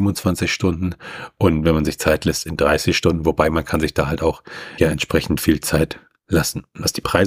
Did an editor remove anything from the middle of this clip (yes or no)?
yes